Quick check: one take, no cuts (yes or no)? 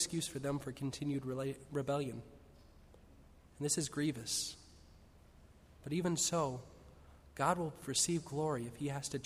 yes